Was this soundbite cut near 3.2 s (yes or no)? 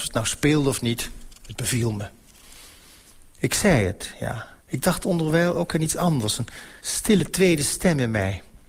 no